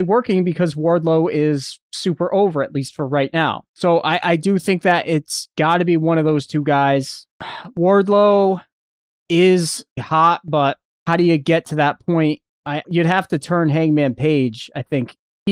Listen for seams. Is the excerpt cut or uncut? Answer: cut